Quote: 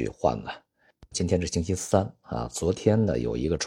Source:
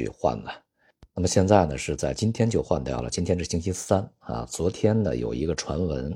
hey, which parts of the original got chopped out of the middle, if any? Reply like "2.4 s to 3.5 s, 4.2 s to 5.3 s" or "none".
1.1 s to 3.1 s